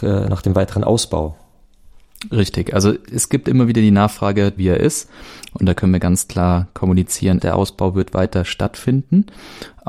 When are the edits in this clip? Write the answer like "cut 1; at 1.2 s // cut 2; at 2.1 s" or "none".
cut 1; at 4.6 s // cut 2; at 7.4 s